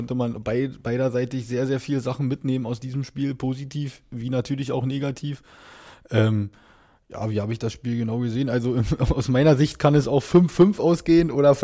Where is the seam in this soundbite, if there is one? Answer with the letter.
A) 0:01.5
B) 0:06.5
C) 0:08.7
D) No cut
D